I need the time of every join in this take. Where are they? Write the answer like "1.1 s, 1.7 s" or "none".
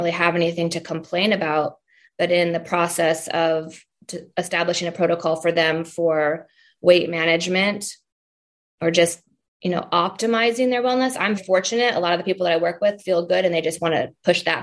11.4 s